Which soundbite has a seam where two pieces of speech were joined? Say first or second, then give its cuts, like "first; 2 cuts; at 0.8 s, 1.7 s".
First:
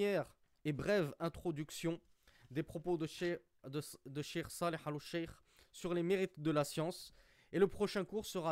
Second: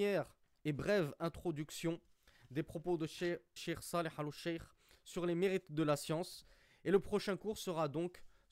second; 1 cut; at 3.6 s